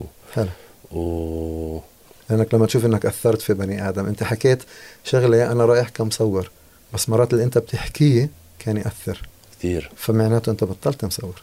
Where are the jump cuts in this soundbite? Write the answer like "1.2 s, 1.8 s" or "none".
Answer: 2.2 s